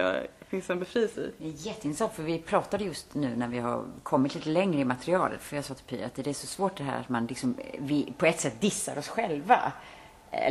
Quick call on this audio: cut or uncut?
uncut